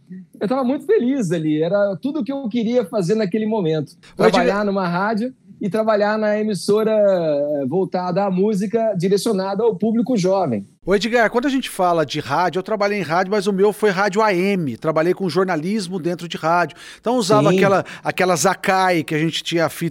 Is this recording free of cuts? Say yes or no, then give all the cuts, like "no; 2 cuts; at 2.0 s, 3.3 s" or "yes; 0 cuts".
yes; 0 cuts